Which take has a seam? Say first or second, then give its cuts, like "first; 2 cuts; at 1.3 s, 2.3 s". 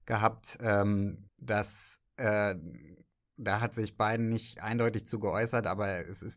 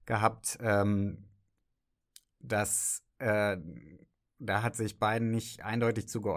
first; 1 cut; at 1.3 s